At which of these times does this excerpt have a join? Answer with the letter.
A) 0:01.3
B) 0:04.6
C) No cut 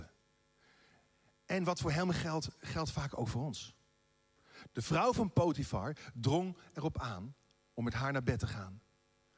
B